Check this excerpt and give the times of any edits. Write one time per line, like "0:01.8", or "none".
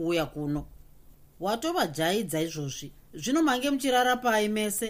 0:03.1